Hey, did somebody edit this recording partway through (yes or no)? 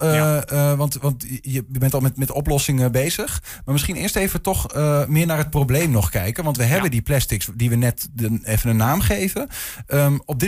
no